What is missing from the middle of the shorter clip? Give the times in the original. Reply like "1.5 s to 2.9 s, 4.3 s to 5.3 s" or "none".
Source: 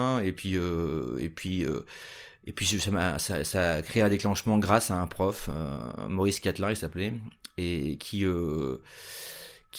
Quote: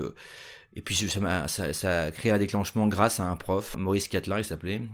5.4 s to 6.1 s